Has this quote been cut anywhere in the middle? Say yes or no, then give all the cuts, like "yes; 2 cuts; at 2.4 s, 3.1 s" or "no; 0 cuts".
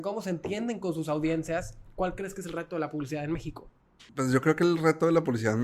yes; 1 cut; at 4.1 s